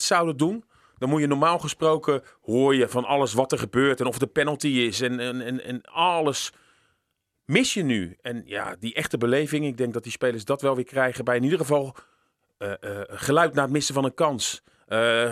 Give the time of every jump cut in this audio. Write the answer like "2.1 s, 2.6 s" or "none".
none